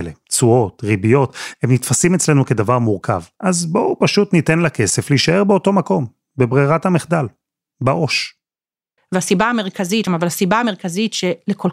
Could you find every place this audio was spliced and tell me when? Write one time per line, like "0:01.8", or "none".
0:09.0
0:10.1